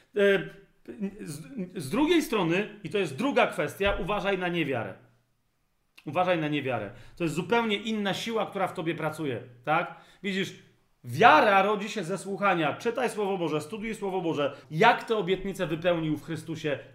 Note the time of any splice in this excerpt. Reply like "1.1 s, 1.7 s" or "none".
14.6 s